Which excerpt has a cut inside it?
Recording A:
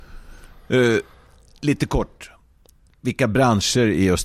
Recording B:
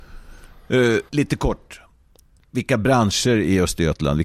B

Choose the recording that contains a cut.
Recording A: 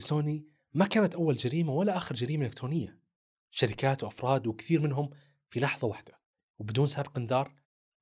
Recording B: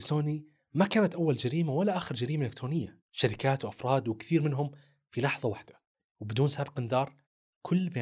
B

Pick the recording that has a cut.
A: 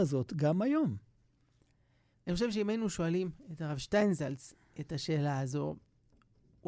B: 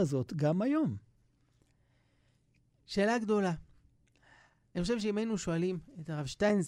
A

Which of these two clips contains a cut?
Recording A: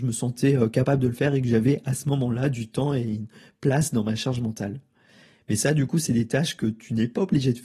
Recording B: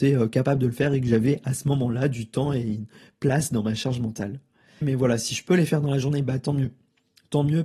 B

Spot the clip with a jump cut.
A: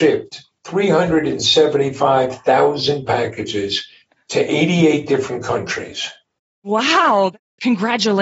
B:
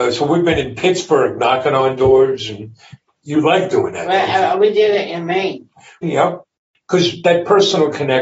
B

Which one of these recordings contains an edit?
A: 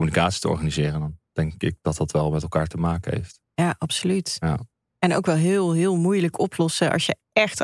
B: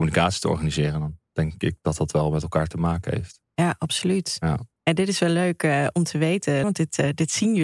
B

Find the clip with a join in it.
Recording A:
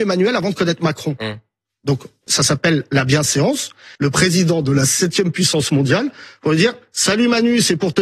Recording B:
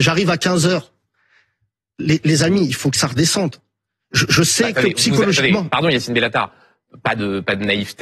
A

